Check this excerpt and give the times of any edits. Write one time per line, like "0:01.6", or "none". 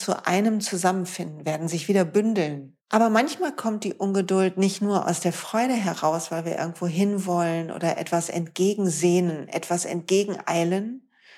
0:02.8